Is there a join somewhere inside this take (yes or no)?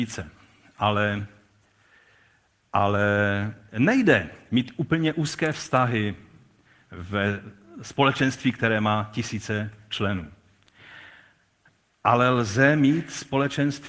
no